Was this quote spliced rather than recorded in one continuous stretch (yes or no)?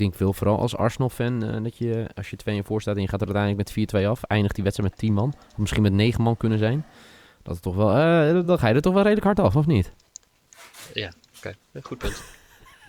no